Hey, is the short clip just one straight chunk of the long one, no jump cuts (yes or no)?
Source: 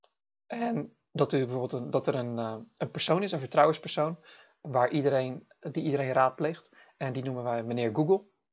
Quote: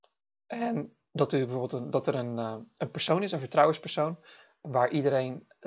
yes